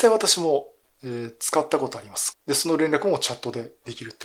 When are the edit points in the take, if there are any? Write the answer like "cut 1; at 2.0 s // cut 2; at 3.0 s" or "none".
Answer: cut 1; at 2.3 s